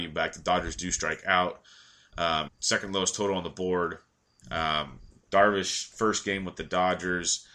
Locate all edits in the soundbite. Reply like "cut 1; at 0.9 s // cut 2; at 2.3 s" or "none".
cut 1; at 2.5 s // cut 2; at 4.4 s